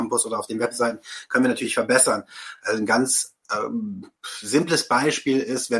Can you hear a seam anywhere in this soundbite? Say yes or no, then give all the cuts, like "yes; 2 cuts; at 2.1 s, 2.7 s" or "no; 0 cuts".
no; 0 cuts